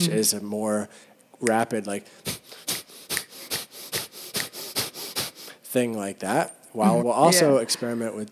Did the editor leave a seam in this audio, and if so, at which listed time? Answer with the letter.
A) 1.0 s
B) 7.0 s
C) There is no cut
B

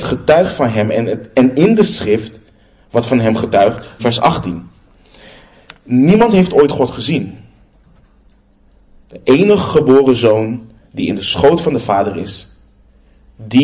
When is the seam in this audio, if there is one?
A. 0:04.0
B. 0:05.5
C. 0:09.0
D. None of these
A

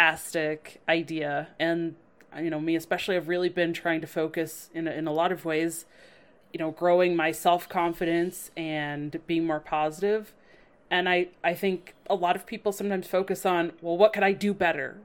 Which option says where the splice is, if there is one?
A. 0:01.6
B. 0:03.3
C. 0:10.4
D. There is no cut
A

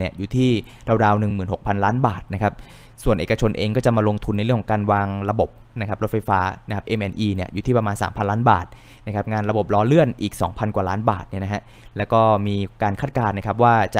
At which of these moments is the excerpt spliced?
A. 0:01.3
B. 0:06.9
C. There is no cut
A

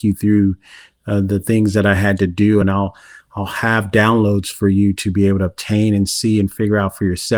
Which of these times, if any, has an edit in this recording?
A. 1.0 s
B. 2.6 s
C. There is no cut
B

